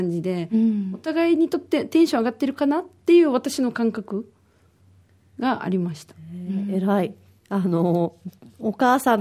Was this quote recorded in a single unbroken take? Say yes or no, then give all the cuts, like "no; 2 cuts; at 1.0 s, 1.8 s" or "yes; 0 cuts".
yes; 0 cuts